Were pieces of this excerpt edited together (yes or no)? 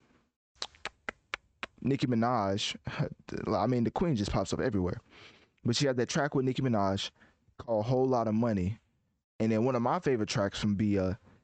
no